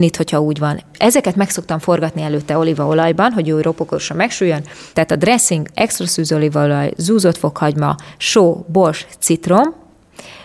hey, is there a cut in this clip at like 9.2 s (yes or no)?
no